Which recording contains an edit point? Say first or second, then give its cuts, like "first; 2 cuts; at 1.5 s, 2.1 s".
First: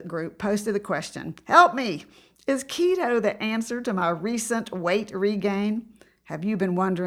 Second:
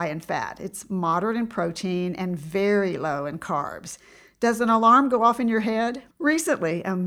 second; 1 cut; at 6.1 s